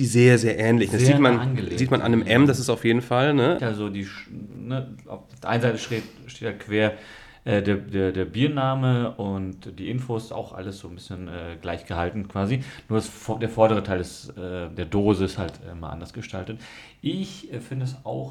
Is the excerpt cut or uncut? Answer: cut